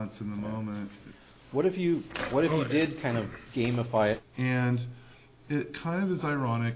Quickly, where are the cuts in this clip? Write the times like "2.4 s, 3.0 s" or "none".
4.2 s